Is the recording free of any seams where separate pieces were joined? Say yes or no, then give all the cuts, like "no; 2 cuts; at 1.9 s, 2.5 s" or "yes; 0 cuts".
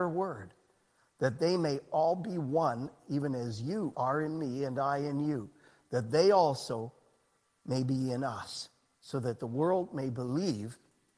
no; 1 cut; at 3.9 s